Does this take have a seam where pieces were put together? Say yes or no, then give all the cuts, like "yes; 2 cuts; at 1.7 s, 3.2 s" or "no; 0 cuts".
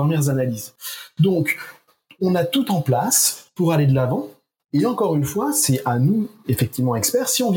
no; 0 cuts